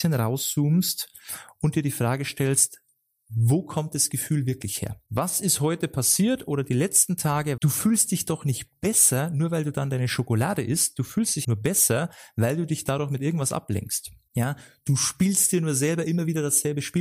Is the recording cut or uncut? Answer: cut